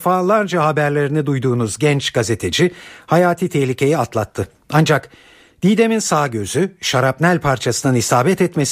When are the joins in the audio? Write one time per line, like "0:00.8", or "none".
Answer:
none